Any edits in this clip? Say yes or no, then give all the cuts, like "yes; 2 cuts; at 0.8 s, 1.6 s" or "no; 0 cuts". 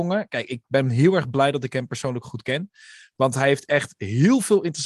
no; 0 cuts